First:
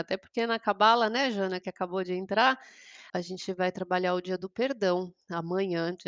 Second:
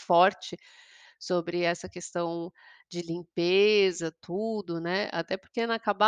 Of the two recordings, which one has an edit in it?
first; 1 cut; at 3.1 s

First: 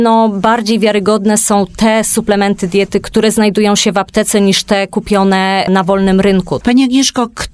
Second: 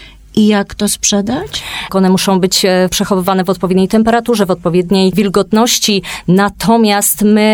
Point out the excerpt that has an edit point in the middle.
second; 1 cut; at 1.9 s

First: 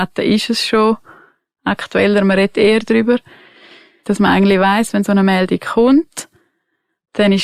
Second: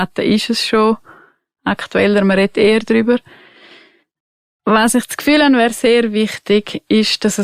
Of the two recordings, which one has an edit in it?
first; 1 cut; at 4.0 s

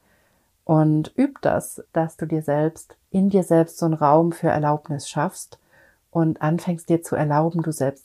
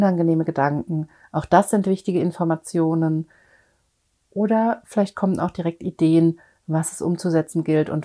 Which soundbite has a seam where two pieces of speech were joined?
first; 2 cuts; at 1.9 s, 3.0 s

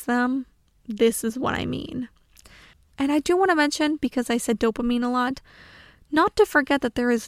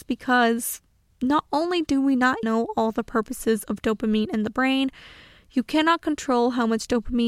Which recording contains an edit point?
second; 1 cut; at 2.4 s

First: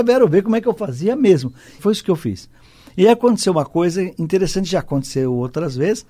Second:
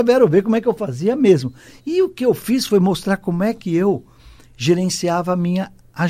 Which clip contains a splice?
first; 1 cut; at 1.8 s

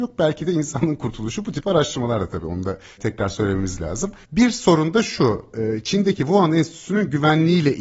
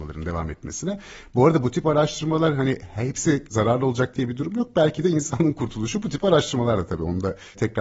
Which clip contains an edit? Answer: first; 1 cut; at 4.2 s

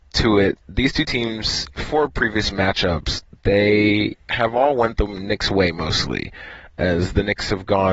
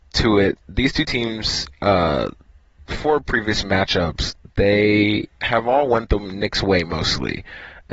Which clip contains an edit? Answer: first; 1 cut; at 1.7 s

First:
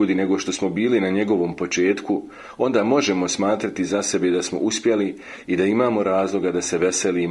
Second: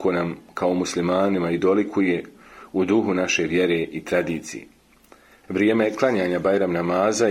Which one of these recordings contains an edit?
second; 1 cut; at 5.4 s

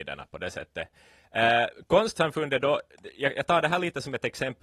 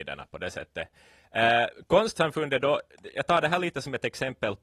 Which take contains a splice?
second; 1 cut; at 3.1 s

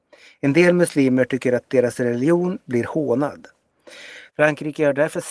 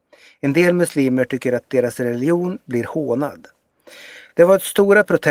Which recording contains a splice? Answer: first; 1 cut; at 4.3 s

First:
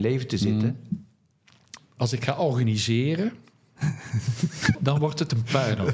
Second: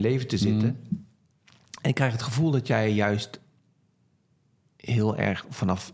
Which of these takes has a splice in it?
first; 2 cuts; at 1.8 s, 4.7 s

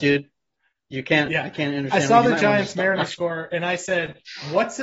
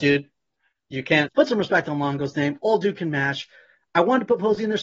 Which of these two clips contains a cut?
second; 1 cut; at 1.3 s

